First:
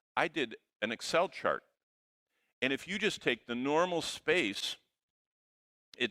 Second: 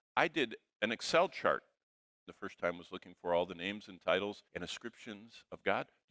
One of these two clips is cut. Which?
second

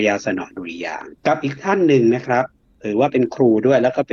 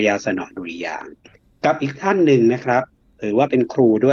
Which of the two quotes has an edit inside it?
first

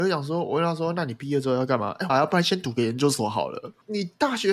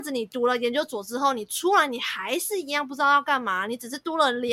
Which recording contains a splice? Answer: first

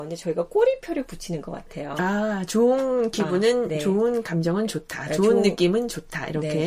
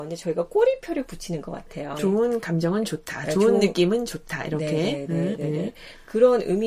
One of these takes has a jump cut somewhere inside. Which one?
second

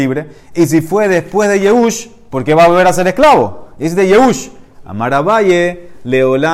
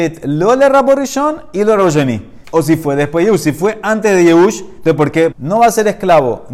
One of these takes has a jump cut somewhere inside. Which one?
second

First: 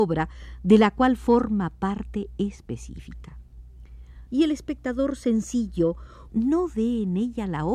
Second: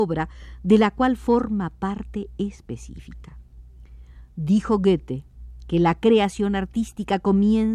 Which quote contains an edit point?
first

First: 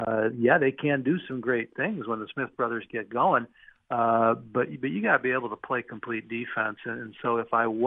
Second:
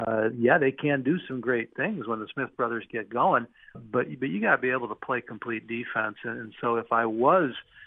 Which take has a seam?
second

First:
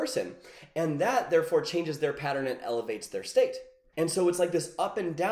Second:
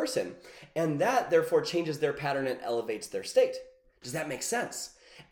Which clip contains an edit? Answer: first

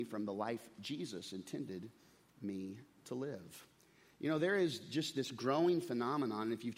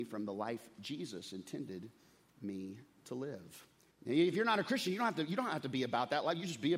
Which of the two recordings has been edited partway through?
second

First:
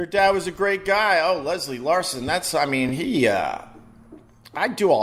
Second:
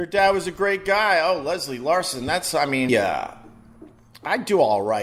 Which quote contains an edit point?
second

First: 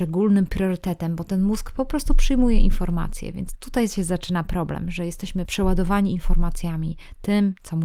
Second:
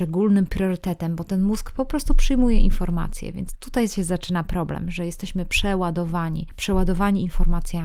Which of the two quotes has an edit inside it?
first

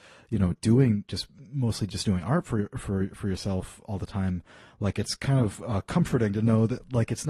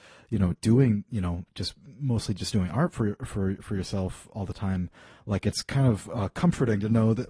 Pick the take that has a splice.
first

